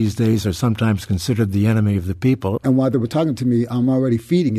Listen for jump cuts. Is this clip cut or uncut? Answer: cut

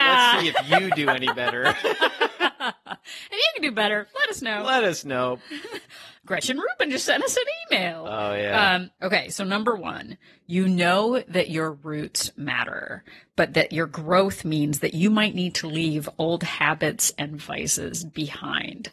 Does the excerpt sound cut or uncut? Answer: uncut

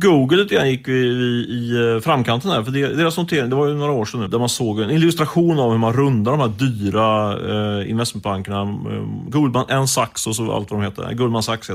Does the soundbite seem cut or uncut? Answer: cut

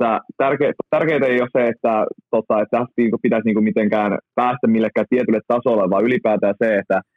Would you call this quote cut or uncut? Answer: uncut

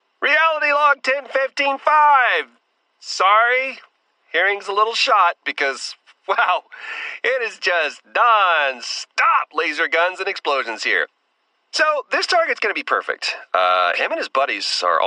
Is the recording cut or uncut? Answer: uncut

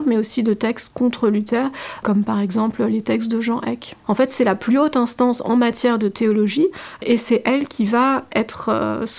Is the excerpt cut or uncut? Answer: cut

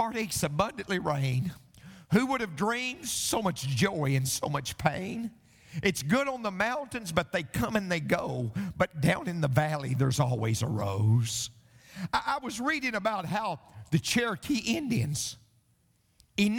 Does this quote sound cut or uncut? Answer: uncut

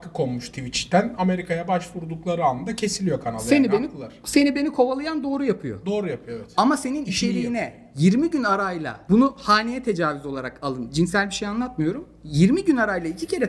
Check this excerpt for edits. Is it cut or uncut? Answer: uncut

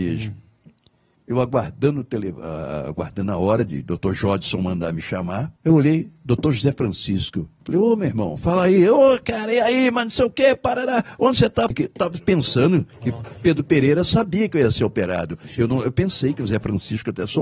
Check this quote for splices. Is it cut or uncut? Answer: cut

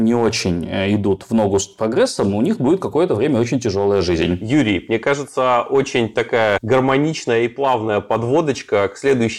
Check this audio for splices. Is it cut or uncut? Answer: uncut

